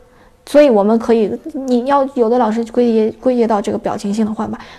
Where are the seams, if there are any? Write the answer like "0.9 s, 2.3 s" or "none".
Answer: none